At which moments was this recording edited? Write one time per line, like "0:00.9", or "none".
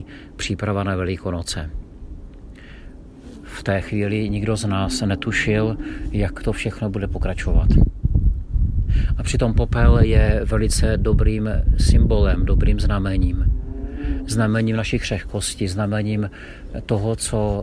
none